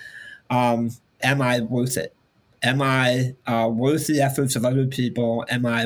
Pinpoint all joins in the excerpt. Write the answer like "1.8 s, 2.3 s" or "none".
1.2 s